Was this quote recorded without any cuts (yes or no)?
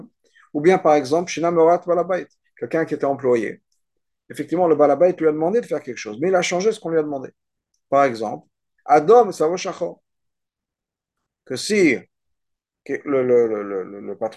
yes